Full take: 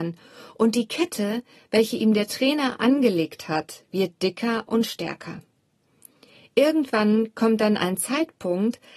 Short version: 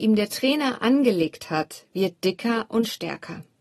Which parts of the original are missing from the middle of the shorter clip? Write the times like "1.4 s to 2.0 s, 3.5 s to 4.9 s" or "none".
none